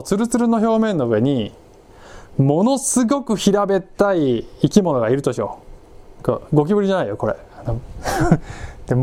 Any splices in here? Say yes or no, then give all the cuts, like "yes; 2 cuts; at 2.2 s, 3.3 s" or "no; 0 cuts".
yes; 1 cut; at 6.2 s